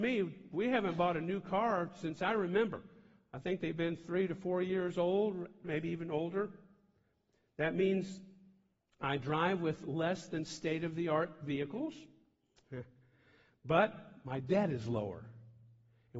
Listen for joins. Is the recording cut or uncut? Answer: cut